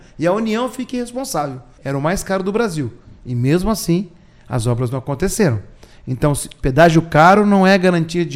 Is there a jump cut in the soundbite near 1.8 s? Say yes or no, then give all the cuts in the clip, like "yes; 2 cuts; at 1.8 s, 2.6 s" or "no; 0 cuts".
yes; 1 cut; at 1.8 s